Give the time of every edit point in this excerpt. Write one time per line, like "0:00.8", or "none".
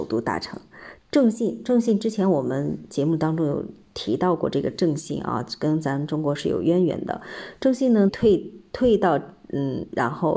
0:01.0
0:08.1